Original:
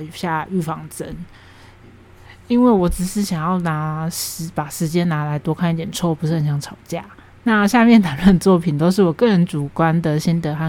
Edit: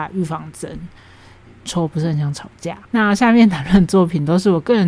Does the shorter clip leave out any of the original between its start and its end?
yes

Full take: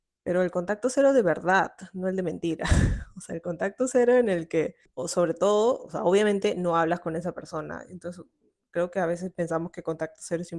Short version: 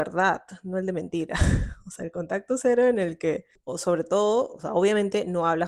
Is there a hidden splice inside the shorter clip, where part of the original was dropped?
no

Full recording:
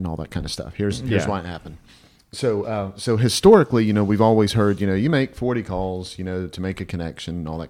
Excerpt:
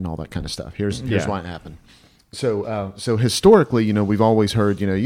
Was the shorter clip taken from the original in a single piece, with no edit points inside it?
yes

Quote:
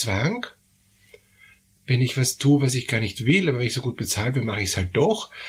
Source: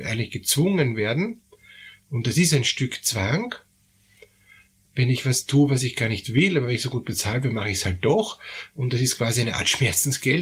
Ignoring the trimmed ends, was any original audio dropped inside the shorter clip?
no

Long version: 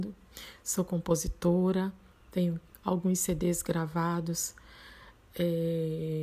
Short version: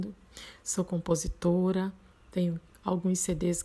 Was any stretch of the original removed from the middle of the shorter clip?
no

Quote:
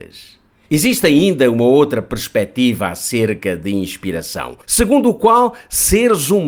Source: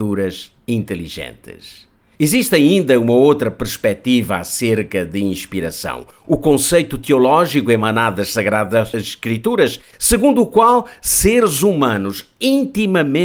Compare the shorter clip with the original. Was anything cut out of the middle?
yes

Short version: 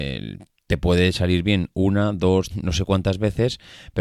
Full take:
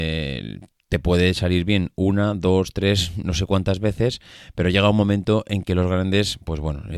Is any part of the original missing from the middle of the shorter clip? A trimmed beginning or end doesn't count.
yes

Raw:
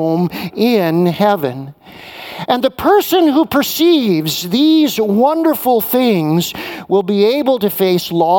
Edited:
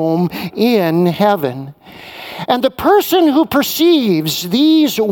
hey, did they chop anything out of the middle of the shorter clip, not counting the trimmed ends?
no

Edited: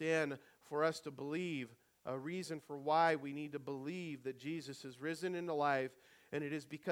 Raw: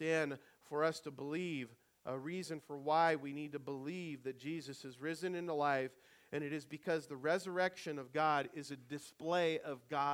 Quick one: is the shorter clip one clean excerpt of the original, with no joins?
yes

